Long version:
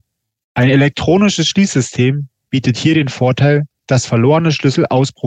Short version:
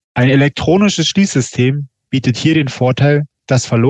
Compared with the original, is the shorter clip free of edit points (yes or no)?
yes